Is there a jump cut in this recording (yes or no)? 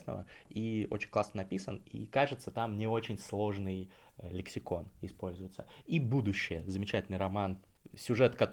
no